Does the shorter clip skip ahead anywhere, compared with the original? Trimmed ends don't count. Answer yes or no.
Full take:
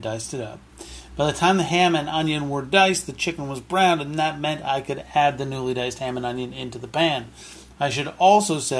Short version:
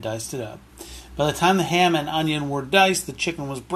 no